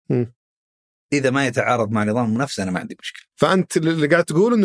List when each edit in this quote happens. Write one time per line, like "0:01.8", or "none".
0:01.1